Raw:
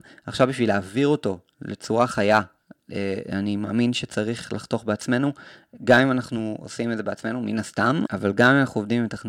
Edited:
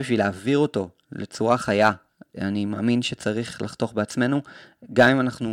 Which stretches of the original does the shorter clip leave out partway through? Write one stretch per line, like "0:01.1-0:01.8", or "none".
0:02.8-0:03.2